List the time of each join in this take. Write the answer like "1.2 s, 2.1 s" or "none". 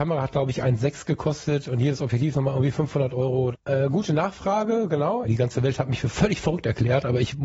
3.5 s, 5.2 s